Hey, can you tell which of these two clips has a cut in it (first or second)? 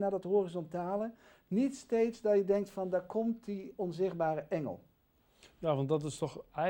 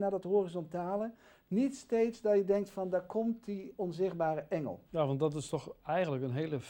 second